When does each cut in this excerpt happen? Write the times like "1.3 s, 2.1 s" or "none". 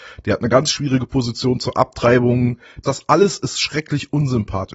2.8 s